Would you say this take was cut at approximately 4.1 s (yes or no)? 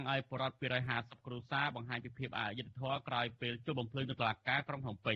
no